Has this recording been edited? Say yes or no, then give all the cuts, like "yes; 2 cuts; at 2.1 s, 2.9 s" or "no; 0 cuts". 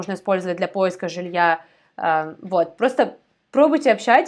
no; 0 cuts